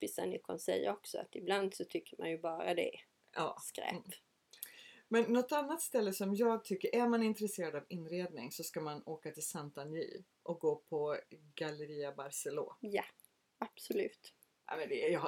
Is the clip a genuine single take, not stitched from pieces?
yes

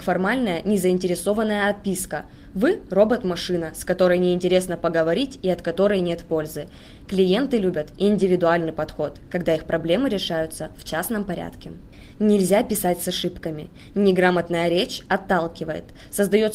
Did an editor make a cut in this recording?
no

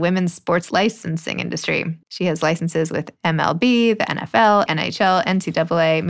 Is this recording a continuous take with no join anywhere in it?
no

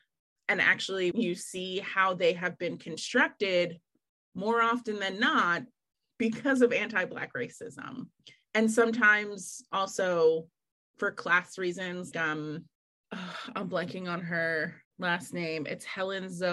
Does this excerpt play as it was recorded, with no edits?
no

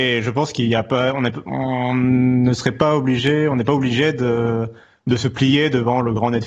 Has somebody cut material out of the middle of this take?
no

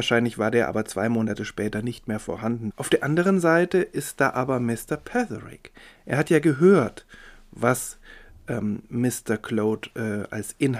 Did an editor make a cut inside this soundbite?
yes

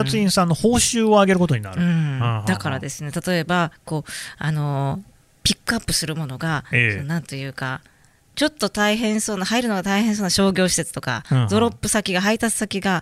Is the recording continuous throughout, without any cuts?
yes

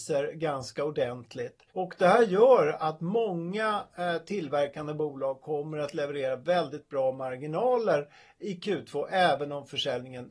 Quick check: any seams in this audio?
yes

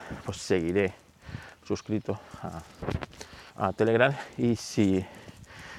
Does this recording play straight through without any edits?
no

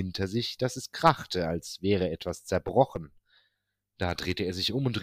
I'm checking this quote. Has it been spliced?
no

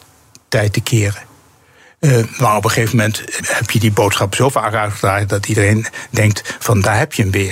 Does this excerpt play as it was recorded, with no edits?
no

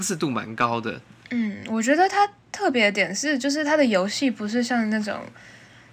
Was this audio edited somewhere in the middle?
no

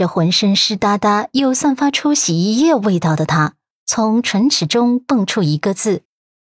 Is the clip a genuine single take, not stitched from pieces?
no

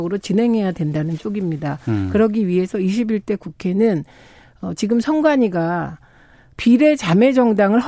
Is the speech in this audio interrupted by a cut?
no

